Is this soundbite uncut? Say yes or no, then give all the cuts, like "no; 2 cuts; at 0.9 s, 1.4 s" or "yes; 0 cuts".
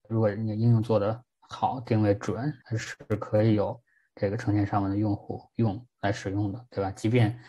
no; 1 cut; at 2.6 s